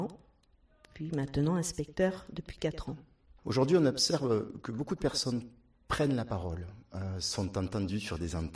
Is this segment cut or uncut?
cut